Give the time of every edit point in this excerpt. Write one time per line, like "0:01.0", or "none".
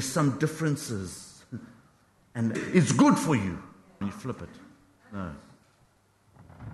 0:02.5
0:04.0